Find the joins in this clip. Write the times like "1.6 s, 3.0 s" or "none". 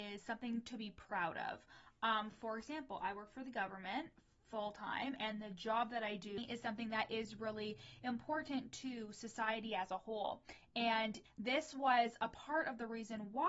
none